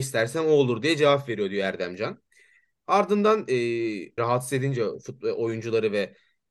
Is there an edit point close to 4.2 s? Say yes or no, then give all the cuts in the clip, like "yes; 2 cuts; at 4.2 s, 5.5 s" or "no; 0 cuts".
yes; 1 cut; at 4.2 s